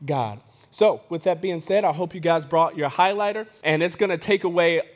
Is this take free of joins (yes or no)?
no